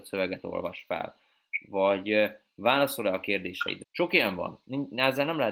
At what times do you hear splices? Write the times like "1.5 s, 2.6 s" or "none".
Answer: 3.8 s